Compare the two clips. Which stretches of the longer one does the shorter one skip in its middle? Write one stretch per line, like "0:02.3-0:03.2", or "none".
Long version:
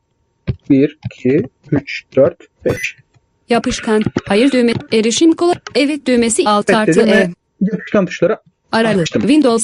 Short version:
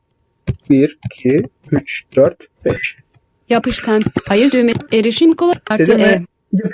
0:05.7-0:06.8